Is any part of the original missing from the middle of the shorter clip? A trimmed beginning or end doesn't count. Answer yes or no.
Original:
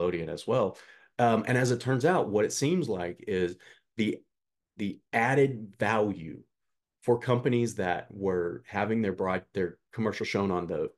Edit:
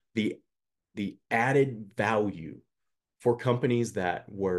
no